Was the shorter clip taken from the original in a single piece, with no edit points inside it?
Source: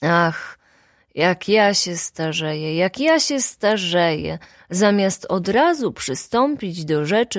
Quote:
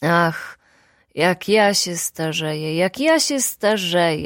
yes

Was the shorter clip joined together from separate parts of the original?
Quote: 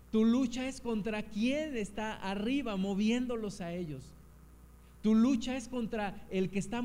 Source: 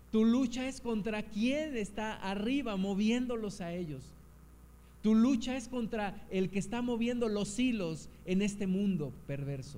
no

